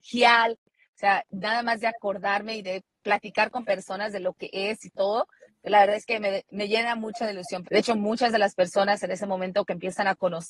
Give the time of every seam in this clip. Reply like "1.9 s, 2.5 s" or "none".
7.6 s